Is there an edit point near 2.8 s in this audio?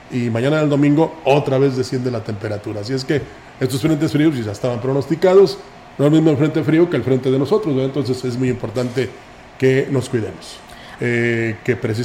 no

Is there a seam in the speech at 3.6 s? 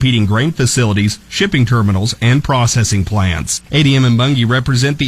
yes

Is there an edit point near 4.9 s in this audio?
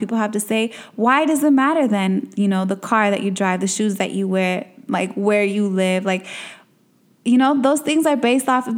yes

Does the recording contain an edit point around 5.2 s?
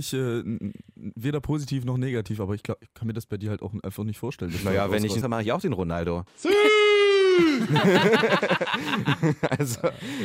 yes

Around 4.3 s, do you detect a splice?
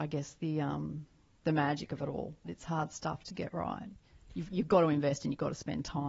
no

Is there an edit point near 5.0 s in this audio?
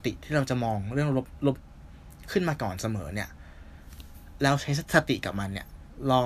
no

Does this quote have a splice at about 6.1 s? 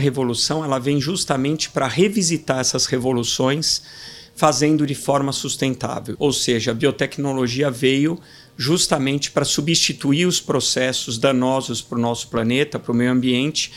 yes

